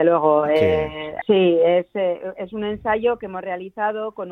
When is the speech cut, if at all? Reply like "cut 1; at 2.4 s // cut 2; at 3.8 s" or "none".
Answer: cut 1; at 1.2 s